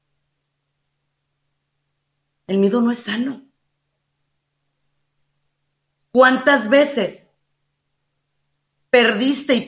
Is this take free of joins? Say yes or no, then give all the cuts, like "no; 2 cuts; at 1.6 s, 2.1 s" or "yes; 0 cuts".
yes; 0 cuts